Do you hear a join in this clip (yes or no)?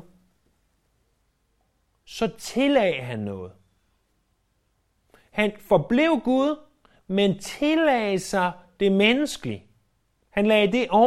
no